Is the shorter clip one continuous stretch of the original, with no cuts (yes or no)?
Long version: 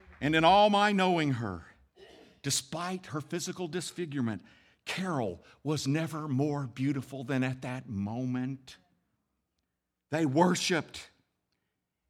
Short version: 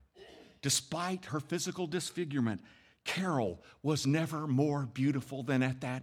yes